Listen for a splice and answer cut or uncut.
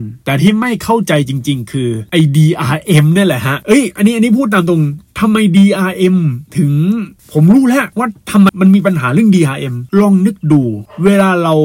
cut